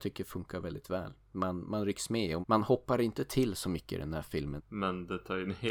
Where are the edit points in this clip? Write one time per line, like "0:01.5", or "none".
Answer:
0:02.4
0:04.6